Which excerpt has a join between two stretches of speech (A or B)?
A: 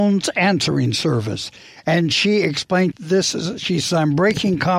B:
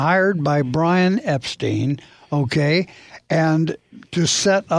A